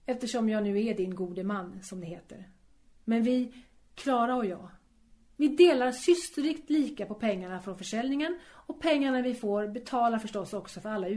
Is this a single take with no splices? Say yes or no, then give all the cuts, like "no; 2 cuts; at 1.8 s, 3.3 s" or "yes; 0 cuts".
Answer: yes; 0 cuts